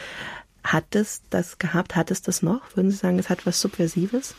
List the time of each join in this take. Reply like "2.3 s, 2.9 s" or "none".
none